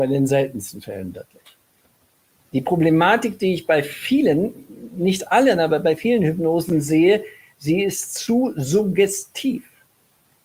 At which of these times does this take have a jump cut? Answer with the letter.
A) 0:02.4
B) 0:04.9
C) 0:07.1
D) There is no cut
A